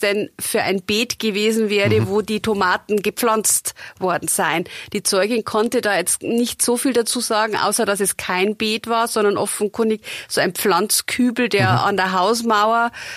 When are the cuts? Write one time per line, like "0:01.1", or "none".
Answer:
none